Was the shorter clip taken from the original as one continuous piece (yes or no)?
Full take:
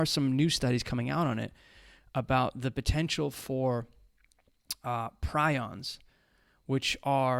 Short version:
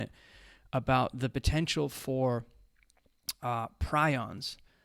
yes